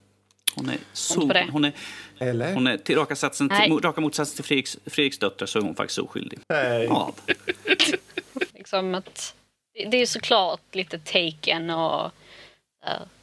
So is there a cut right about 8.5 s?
yes; 2 cuts; at 6.4 s, 8.5 s

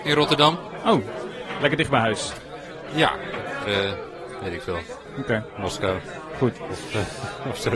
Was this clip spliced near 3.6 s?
yes; 1 cut; at 3.6 s

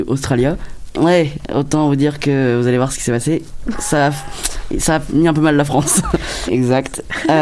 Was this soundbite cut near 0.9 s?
yes; 2 cuts; at 0.9 s, 6.5 s

